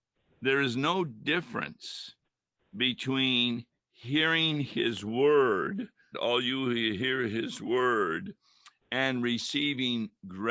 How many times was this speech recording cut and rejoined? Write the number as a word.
one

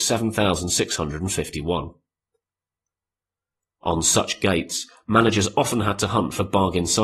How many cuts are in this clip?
zero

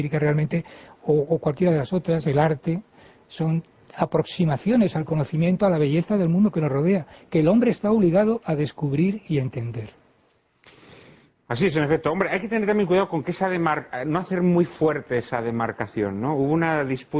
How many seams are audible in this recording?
zero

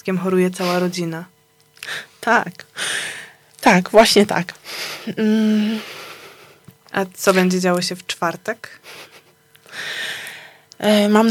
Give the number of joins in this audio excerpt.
zero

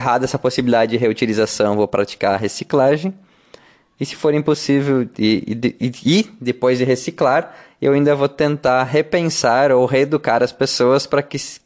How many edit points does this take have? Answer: zero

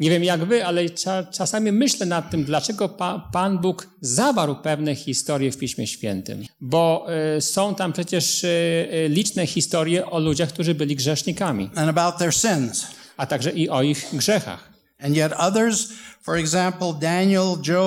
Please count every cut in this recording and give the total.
one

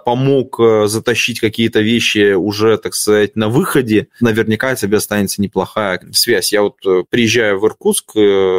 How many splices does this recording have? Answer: two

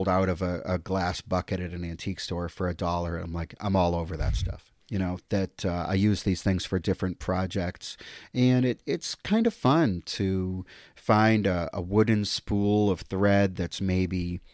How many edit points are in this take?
one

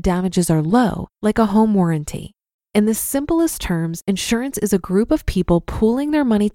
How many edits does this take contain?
two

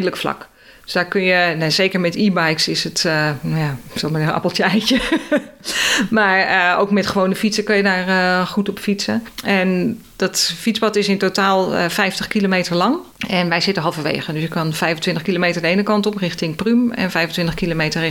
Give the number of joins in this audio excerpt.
zero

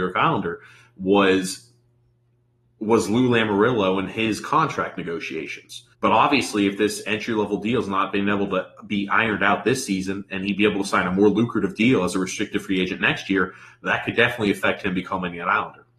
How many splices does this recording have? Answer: one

